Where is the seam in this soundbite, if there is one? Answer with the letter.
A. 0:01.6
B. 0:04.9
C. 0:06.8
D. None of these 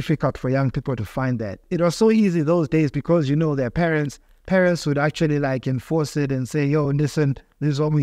D